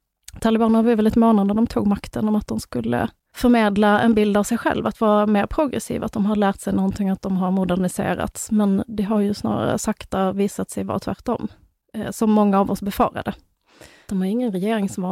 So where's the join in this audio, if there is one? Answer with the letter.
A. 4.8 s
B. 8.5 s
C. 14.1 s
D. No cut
C